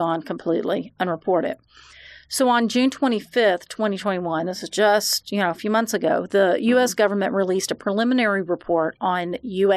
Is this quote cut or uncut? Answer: uncut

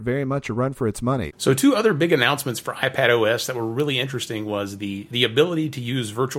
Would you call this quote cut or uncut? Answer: cut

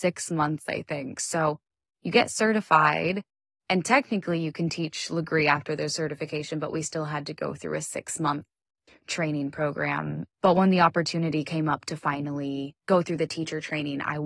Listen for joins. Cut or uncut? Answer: cut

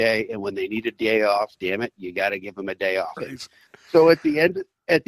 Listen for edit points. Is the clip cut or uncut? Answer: cut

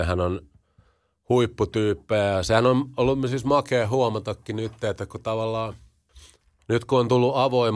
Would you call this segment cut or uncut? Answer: uncut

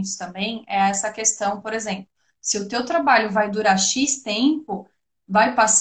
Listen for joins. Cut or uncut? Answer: uncut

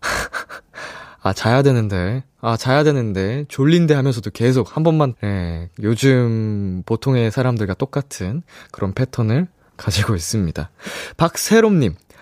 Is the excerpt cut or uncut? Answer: cut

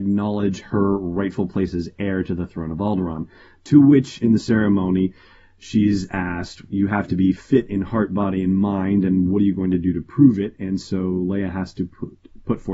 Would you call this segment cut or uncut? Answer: cut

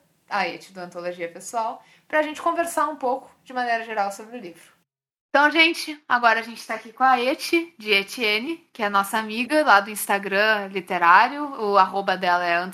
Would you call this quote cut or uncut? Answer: uncut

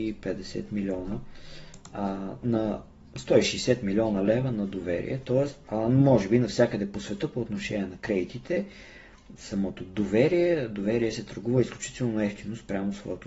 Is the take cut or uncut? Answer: cut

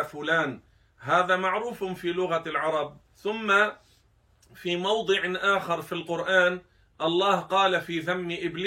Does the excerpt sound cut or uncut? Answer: cut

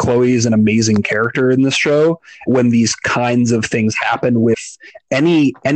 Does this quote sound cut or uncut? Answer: cut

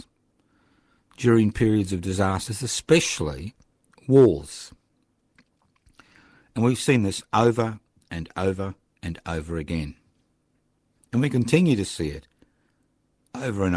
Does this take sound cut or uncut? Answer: uncut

